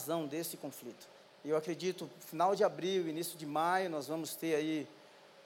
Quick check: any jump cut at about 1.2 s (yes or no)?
yes